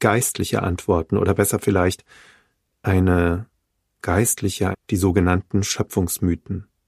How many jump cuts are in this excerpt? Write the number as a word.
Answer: one